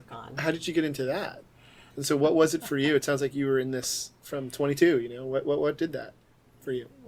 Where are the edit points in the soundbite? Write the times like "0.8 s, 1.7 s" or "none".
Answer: 1.9 s